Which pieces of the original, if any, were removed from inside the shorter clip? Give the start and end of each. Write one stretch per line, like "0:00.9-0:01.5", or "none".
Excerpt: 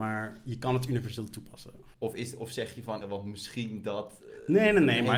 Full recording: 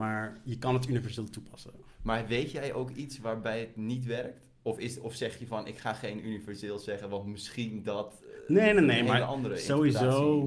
0:01.9-0:04.6
0:05.6-0:07.0